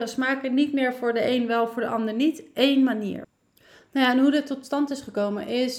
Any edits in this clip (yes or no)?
no